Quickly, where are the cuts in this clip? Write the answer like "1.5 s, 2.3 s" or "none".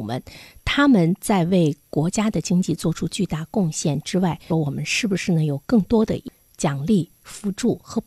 4.5 s